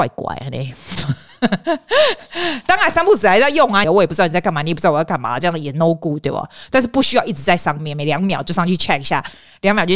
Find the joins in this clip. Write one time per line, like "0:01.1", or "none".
0:03.8